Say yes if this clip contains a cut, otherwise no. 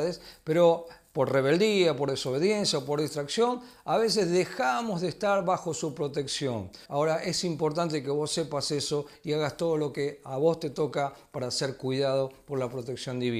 yes